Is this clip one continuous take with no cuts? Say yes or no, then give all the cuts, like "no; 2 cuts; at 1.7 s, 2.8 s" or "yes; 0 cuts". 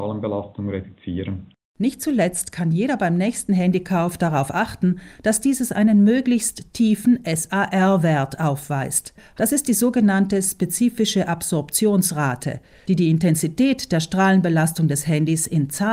yes; 0 cuts